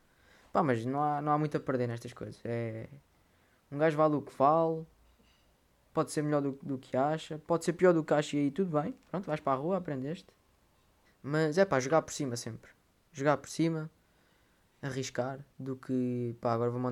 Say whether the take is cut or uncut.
cut